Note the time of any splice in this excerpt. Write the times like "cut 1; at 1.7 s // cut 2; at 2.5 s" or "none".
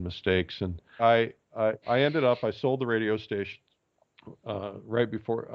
cut 1; at 1.0 s